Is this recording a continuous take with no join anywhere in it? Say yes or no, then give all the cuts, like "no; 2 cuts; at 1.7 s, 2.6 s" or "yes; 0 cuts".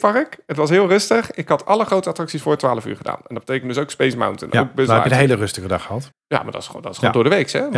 no; 1 cut; at 6.1 s